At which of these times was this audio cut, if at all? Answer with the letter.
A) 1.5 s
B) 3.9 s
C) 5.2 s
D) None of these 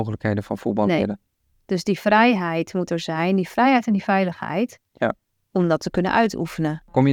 D